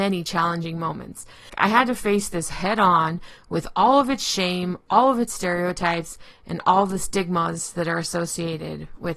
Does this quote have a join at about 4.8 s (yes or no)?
no